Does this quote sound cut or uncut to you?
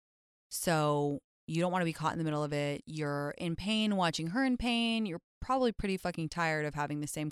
uncut